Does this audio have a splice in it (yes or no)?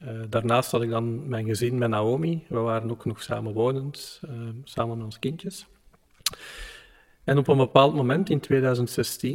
no